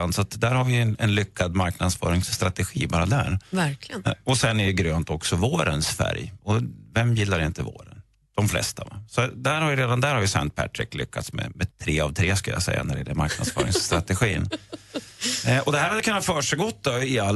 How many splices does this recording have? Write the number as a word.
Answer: one